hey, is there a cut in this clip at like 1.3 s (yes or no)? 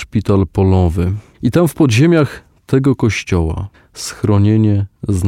yes